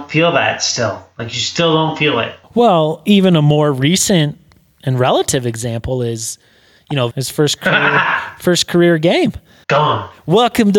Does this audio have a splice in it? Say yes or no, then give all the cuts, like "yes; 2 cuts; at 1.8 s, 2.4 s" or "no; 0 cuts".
yes; 3 cuts; at 2.4 s, 7.1 s, 9.6 s